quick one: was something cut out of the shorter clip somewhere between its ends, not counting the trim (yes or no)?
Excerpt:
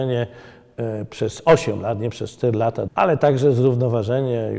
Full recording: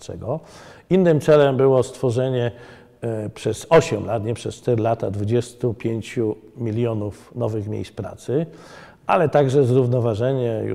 yes